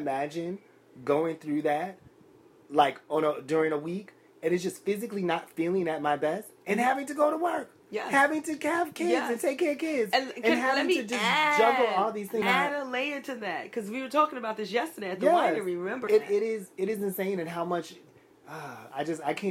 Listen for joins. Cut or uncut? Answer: cut